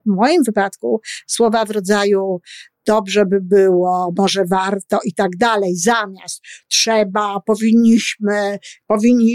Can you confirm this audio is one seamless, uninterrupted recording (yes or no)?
yes